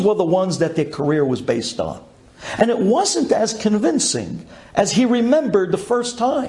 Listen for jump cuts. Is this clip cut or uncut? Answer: cut